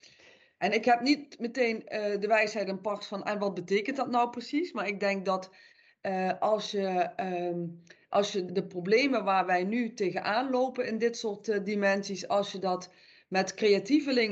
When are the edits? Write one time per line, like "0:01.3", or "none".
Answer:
0:08.5